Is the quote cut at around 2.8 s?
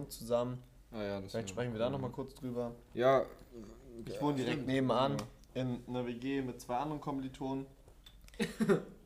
no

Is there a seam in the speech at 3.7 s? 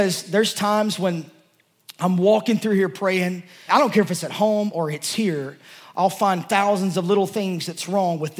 yes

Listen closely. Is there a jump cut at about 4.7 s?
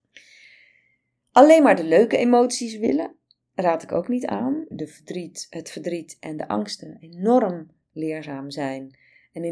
yes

